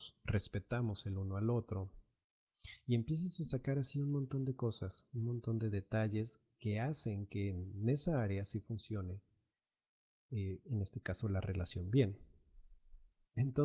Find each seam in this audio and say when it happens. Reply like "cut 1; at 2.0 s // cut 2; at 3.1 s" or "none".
none